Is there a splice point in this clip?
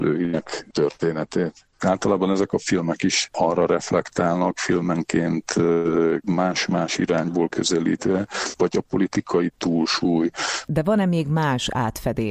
yes; 2 cuts; at 1.8 s, 10.7 s

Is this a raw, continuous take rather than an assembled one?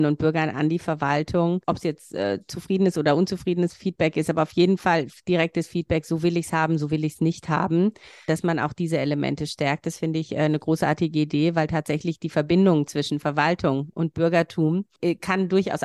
yes; 0 cuts

